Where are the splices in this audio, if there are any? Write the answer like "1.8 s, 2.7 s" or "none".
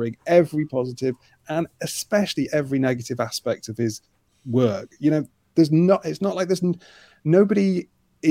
none